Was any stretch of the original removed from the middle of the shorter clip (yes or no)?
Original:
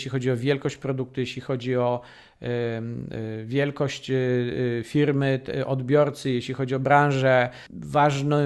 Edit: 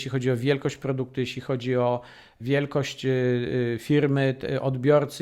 yes